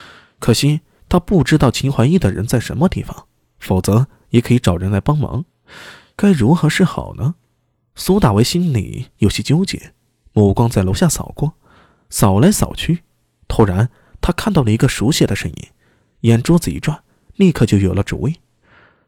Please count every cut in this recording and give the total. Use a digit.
0